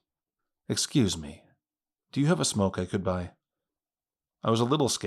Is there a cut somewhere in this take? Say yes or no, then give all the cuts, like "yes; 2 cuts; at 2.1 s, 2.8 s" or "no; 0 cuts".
no; 0 cuts